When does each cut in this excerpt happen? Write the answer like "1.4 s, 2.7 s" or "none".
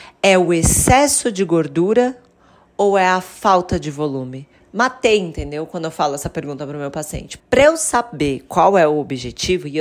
4.6 s, 7.4 s